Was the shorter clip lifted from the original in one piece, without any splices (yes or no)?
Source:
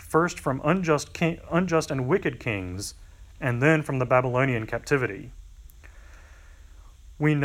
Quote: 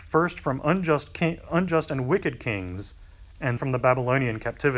no